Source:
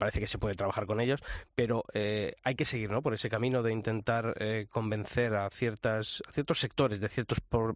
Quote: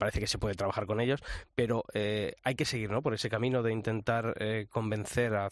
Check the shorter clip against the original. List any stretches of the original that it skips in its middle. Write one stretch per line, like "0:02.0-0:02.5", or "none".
none

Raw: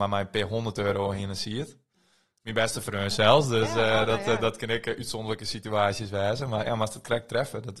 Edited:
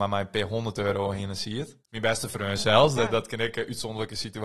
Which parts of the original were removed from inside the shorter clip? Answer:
0:01.8-0:02.3
0:03.5-0:04.3

